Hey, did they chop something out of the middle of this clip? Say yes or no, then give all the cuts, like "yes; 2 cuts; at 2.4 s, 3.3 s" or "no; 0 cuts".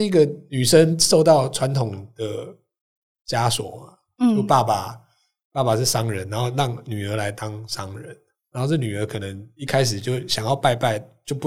no; 0 cuts